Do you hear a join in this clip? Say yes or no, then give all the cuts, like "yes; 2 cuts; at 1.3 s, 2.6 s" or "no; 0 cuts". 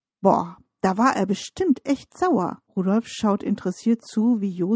yes; 1 cut; at 2.7 s